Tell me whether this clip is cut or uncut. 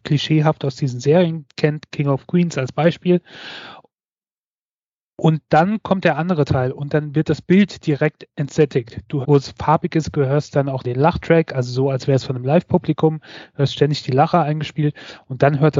cut